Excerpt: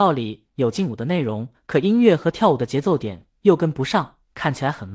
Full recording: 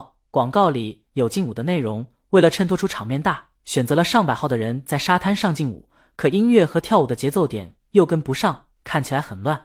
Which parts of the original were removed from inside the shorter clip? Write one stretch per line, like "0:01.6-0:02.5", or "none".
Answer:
0:02.1-0:06.0